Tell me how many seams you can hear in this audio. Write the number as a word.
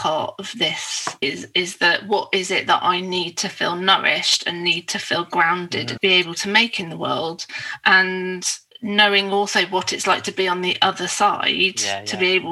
one